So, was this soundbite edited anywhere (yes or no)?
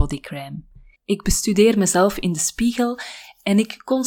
yes